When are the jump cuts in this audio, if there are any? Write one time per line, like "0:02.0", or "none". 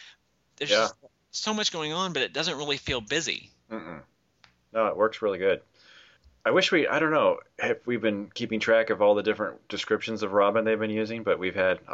none